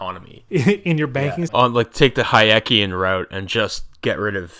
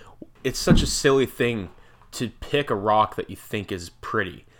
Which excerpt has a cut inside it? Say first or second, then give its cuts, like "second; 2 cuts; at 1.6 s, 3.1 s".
first; 1 cut; at 1.5 s